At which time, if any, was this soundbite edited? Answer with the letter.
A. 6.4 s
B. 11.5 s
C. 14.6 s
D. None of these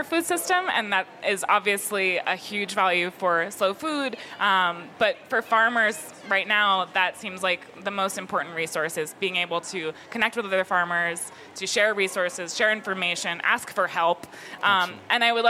D